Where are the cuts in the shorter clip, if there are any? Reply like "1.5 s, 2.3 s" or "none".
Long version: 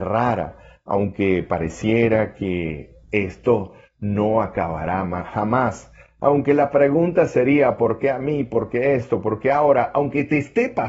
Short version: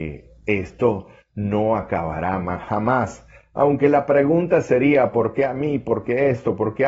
none